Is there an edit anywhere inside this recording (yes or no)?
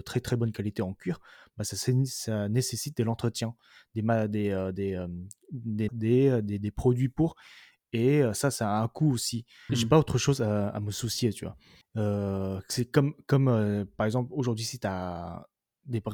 yes